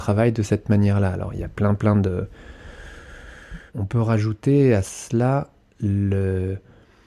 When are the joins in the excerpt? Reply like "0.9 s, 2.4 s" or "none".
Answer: 3.7 s